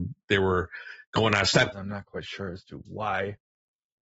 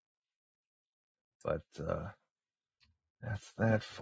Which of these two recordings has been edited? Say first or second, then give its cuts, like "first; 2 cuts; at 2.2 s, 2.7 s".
first; 1 cut; at 1.7 s